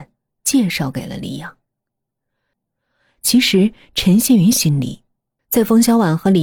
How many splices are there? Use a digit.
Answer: 2